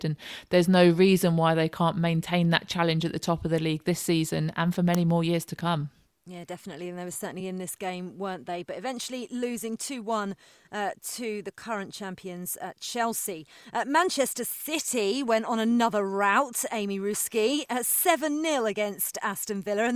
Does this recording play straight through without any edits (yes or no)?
yes